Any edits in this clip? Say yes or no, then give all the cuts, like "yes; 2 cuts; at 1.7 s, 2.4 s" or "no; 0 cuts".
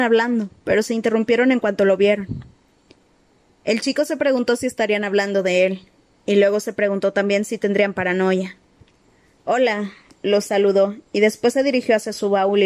no; 0 cuts